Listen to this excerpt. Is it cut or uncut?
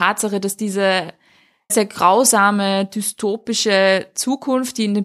cut